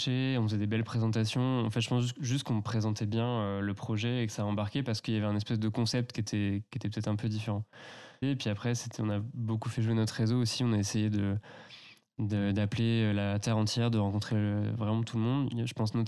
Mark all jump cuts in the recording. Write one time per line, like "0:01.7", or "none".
0:08.2